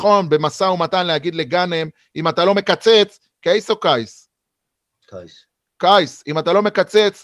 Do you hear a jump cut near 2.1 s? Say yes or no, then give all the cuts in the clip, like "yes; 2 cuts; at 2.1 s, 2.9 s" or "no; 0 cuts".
yes; 1 cut; at 2.1 s